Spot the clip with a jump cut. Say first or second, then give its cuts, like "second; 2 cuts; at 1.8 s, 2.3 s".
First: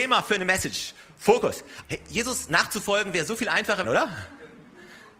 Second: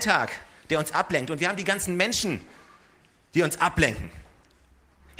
first; 2 cuts; at 1.8 s, 3.8 s